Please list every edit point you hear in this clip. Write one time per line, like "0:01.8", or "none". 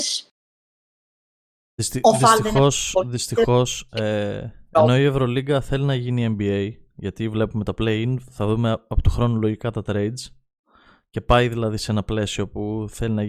none